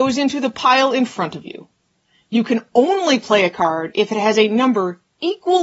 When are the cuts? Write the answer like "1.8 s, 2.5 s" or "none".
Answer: none